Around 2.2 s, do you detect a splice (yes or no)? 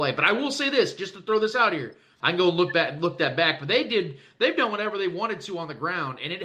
yes